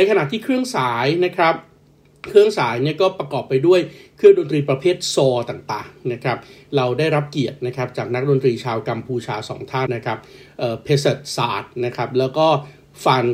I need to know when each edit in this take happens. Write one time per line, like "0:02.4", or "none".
0:09.9